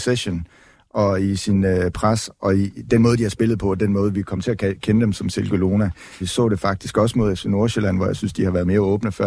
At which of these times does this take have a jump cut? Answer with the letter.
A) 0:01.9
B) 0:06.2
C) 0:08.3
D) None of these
B